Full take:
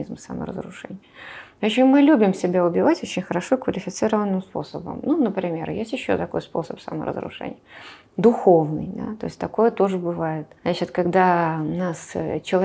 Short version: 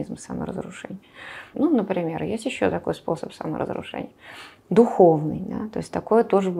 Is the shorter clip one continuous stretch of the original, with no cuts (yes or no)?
no